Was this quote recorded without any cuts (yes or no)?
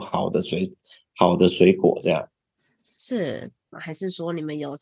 no